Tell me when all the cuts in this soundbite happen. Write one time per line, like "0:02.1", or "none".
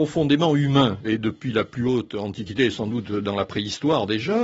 0:01.0